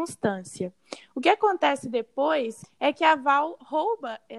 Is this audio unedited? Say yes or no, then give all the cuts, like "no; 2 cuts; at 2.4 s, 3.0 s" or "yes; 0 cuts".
no; 1 cut; at 2.6 s